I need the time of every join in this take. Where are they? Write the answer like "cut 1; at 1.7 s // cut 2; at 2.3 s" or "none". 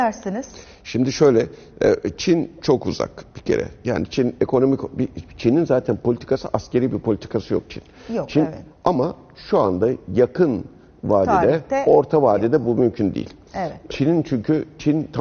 cut 1; at 8.7 s // cut 2; at 13.9 s